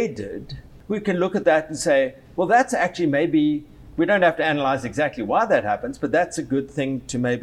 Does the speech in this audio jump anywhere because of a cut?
no; 0 cuts

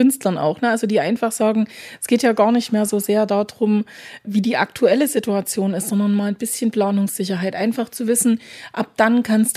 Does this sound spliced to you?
no; 0 cuts

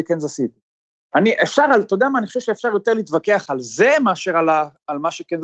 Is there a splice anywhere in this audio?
no; 0 cuts

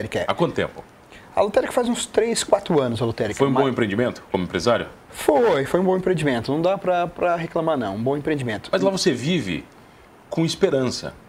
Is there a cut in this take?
no; 0 cuts

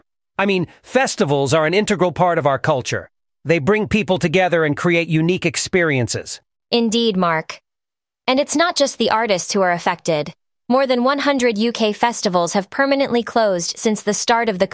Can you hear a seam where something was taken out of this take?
yes; 1 cut; at 10.6 s

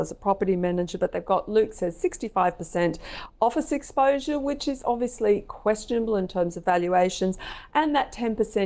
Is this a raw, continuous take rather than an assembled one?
yes; 0 cuts

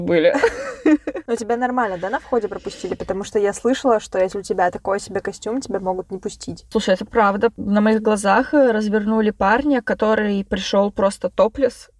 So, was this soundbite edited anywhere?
no; 0 cuts

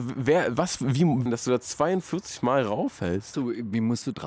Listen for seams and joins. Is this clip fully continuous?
no; 2 cuts; at 1.3 s, 3.3 s

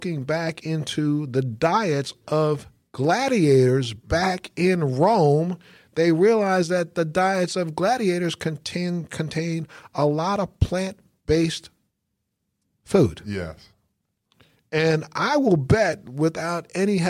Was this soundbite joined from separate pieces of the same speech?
no; 0 cuts

